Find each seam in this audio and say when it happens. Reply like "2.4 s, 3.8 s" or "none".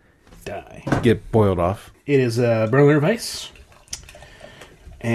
1.9 s